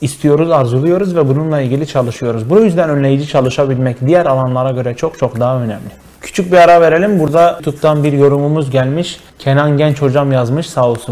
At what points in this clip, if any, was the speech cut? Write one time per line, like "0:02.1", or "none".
none